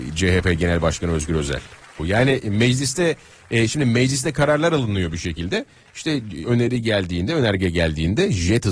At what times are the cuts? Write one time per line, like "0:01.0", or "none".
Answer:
0:02.0
0:06.4